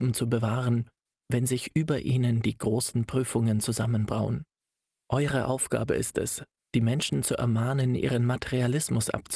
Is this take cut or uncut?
cut